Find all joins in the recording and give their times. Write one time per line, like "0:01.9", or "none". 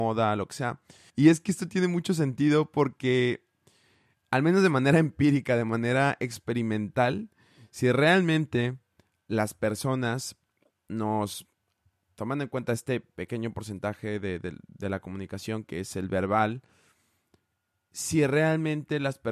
0:01.1